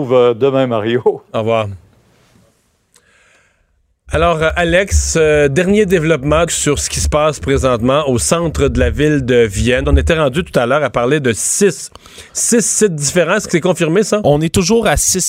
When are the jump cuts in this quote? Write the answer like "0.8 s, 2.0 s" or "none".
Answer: 6.5 s, 9.8 s